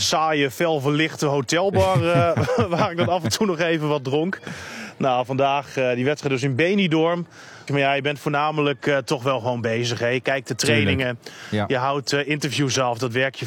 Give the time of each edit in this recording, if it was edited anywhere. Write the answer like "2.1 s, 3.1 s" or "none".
7.7 s